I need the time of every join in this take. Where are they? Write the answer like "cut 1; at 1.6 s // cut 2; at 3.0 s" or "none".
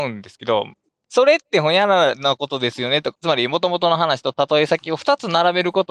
cut 1; at 3.1 s